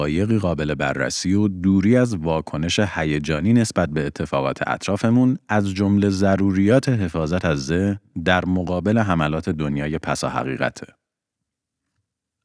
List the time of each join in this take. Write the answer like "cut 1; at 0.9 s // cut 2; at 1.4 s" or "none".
none

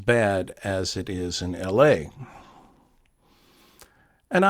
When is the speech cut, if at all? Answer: none

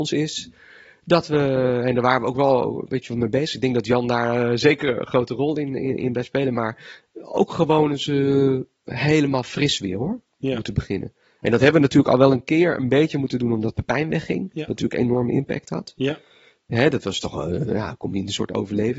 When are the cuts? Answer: none

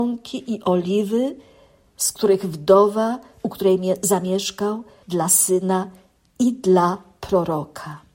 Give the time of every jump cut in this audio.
cut 1; at 5.0 s

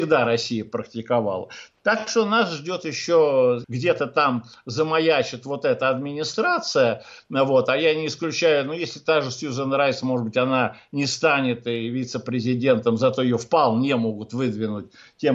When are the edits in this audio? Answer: cut 1; at 3.6 s

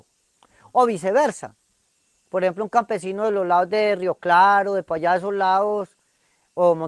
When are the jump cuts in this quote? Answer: none

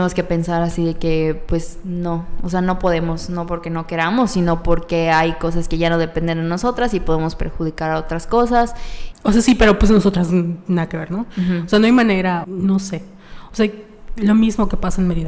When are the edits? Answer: cut 1; at 9.1 s // cut 2; at 12.4 s

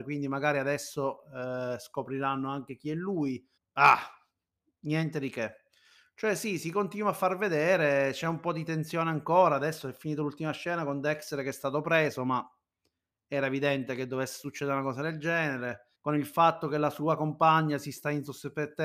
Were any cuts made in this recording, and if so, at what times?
cut 1; at 3.6 s // cut 2; at 15.9 s

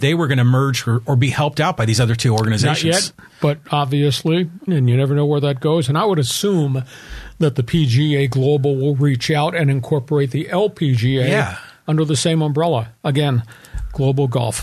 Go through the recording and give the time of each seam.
cut 1; at 4.7 s

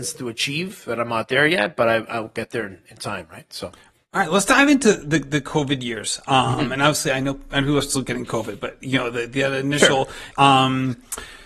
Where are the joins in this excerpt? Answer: cut 1; at 10.3 s

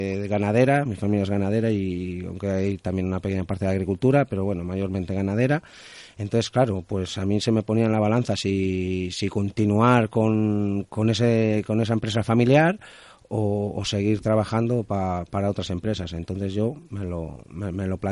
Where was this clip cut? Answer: none

